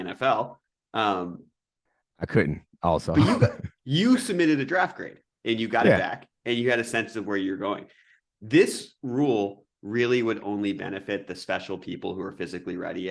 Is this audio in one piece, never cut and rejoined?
yes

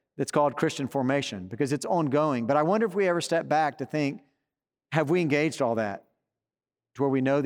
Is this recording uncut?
yes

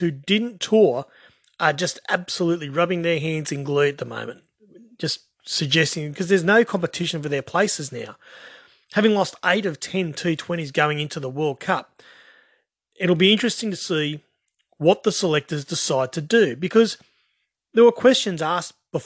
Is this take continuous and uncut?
yes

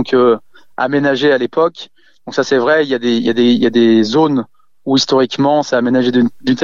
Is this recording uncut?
yes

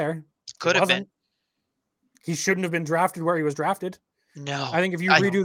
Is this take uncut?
yes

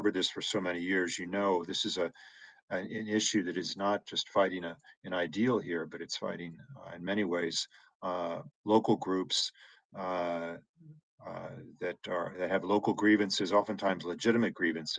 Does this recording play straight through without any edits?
yes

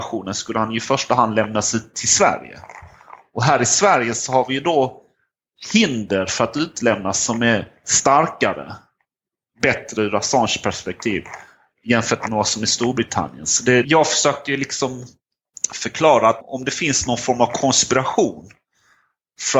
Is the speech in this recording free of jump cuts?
no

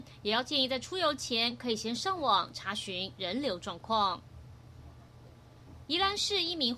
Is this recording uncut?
no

